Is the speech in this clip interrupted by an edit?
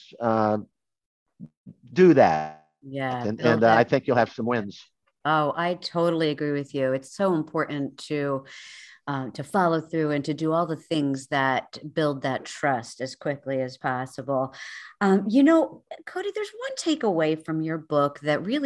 no; 0 cuts

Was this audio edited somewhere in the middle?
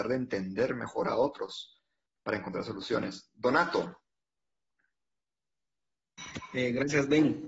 no; 0 cuts

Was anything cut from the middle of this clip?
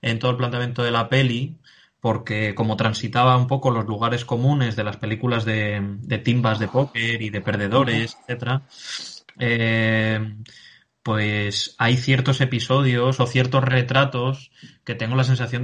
no; 0 cuts

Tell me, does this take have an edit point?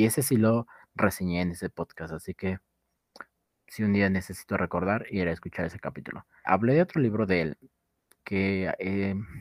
yes; 1 cut; at 6.5 s

